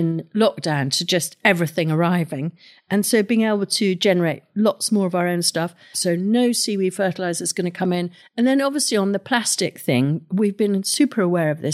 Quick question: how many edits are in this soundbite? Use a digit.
2